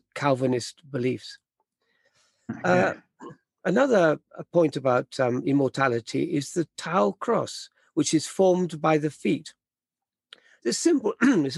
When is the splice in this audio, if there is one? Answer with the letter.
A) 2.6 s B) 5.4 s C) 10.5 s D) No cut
D